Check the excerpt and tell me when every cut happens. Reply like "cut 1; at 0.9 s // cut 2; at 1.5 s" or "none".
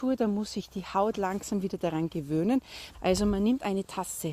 cut 1; at 2.9 s

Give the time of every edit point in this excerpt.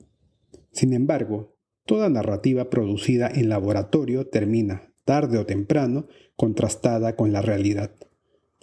none

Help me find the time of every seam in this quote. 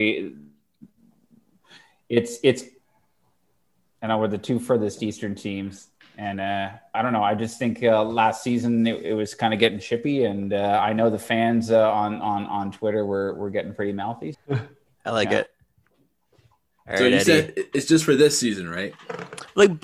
cut 1; at 6.9 s // cut 2; at 14.3 s

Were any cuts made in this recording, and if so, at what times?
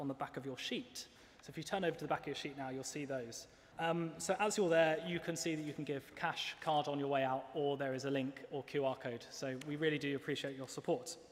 cut 1; at 3.7 s

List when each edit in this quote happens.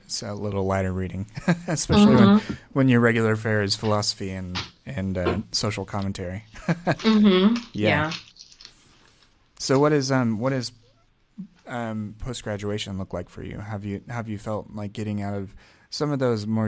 none

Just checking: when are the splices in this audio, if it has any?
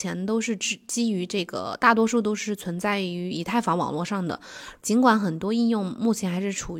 cut 1; at 4.8 s

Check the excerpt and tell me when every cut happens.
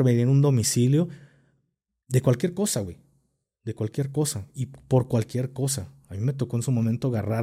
none

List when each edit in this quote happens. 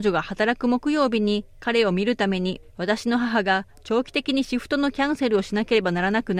none

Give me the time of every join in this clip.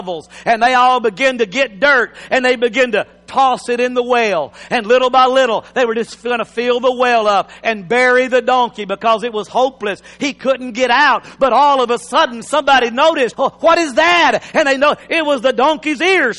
cut 1; at 13.3 s

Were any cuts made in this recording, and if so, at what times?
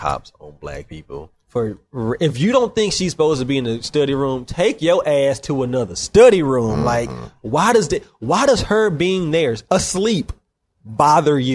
cut 1; at 1.4 s

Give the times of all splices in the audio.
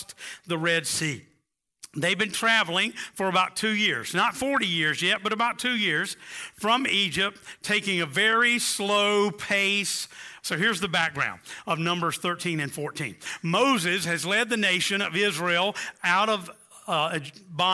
cut 1; at 10.4 s

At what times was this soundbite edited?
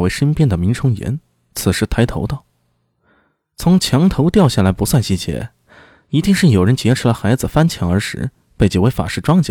none

